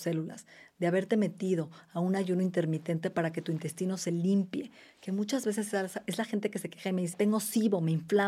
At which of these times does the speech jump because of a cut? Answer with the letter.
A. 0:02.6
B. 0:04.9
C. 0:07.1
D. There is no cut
C